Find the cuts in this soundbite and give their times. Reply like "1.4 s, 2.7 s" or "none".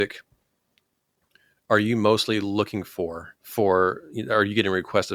3.4 s